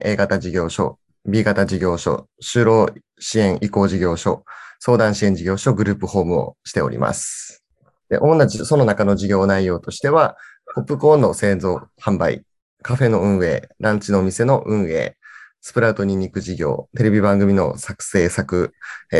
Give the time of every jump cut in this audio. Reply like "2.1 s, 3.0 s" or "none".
none

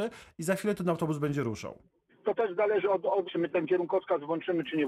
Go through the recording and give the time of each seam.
2.1 s, 3.2 s

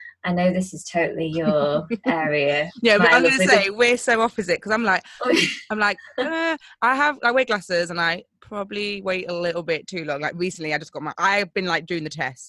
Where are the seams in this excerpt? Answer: none

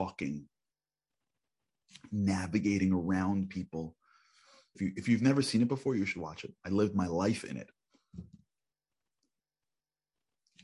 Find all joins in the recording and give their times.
4.7 s

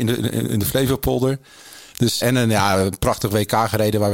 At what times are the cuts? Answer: 2.2 s

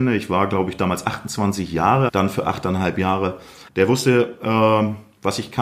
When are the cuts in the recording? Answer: 2.1 s, 3.7 s

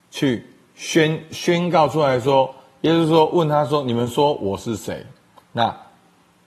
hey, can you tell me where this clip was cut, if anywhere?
5.4 s

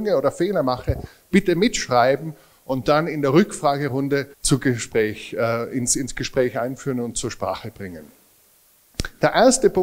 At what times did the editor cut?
4.3 s

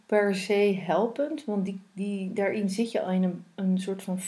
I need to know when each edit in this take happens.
none

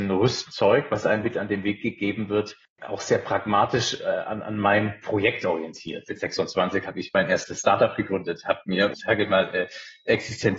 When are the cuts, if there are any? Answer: 6.1 s, 8.9 s

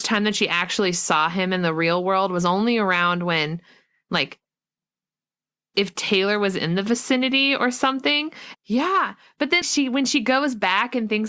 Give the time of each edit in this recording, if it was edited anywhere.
8.5 s, 9.6 s

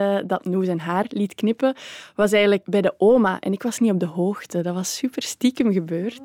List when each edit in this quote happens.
2.6 s

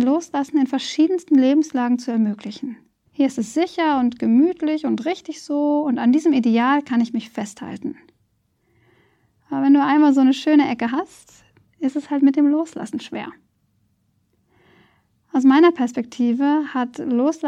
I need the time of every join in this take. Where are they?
3.1 s

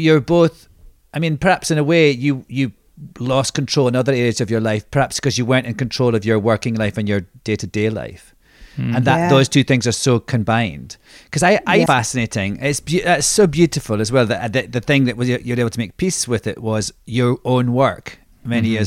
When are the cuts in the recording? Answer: 11.9 s

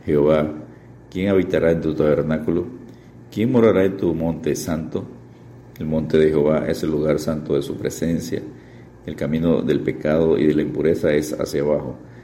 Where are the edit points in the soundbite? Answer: 5.6 s, 8.9 s

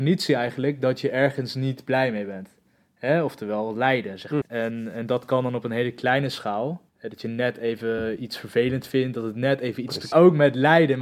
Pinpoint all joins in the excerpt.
4.4 s, 6.9 s, 10.1 s

